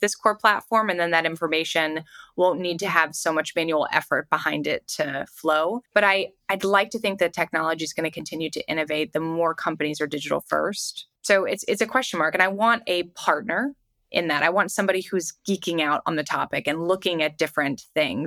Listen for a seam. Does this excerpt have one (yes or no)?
yes